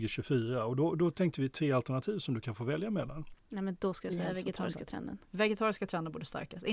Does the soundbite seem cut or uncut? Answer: cut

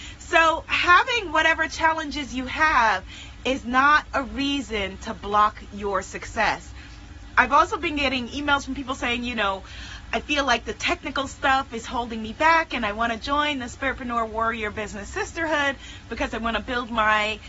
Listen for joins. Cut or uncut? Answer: uncut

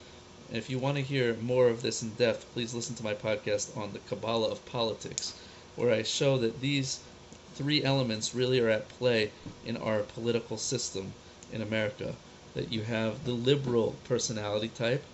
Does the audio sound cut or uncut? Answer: uncut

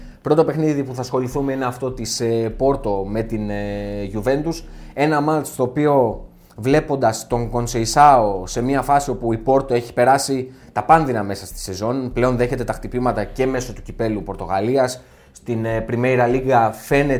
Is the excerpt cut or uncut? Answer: uncut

